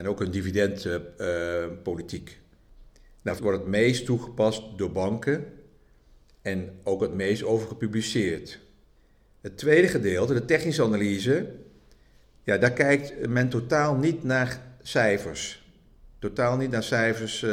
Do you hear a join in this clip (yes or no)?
yes